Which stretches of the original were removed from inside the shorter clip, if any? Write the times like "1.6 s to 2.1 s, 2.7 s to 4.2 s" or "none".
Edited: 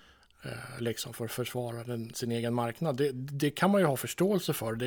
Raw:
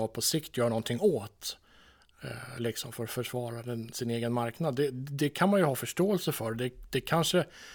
none